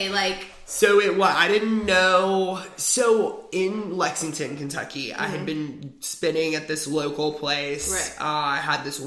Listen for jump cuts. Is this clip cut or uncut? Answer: uncut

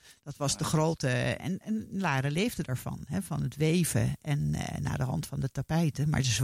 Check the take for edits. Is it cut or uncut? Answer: uncut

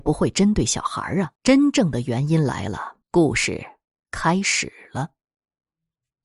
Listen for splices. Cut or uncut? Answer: cut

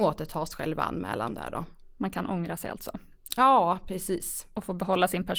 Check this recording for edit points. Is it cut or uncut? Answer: uncut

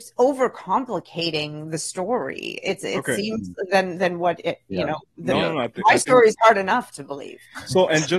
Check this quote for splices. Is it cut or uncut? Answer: uncut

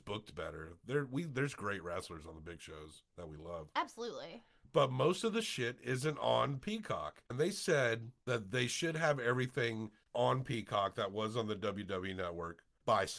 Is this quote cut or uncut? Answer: uncut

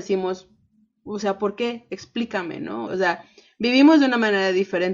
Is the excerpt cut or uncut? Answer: cut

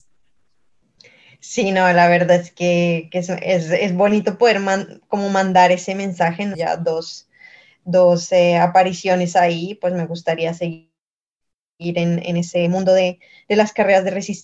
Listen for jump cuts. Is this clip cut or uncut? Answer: cut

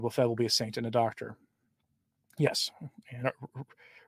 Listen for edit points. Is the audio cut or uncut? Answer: uncut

